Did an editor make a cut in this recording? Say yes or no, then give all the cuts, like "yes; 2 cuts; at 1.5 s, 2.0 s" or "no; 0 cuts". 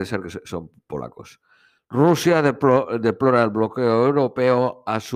no; 0 cuts